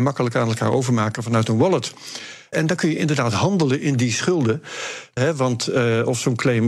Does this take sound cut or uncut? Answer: cut